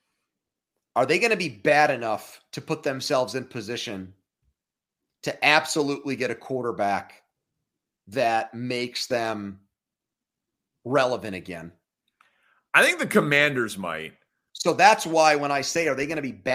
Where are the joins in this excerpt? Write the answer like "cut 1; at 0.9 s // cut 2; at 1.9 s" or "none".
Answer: cut 1; at 14.5 s